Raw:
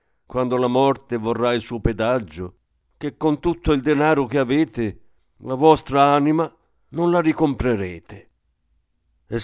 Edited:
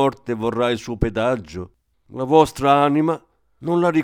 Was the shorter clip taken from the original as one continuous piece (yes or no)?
no